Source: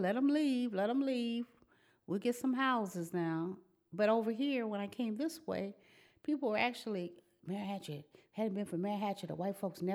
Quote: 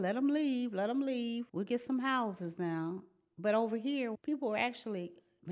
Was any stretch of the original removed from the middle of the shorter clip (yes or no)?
yes